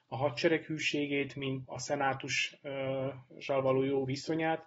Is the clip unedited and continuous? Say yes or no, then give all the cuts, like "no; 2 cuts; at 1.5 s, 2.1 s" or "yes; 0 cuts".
no; 1 cut; at 1.6 s